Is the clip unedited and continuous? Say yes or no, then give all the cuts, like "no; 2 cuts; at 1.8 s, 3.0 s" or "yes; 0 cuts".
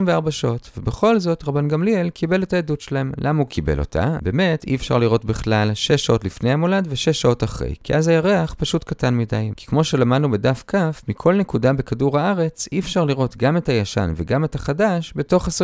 no; 2 cuts; at 4.2 s, 9.5 s